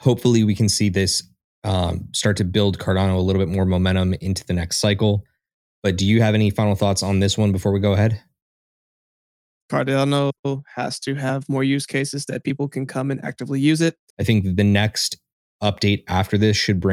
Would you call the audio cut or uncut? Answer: cut